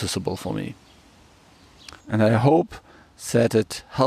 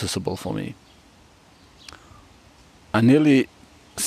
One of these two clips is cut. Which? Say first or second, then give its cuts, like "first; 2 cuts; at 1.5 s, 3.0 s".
first; 1 cut; at 2.0 s